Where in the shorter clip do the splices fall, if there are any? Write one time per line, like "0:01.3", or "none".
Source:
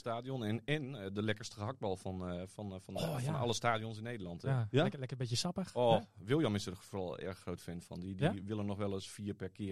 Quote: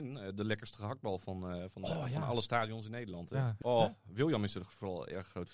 0:01.7
0:03.6